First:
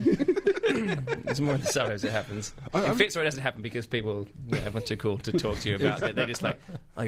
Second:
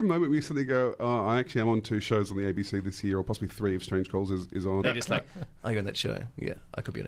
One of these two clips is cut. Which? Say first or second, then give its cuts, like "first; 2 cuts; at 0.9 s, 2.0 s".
second; 1 cut; at 4.8 s